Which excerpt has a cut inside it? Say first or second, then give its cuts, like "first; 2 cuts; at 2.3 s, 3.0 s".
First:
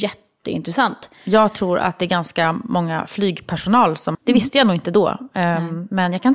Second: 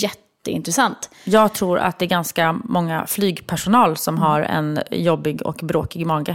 first; 1 cut; at 4.1 s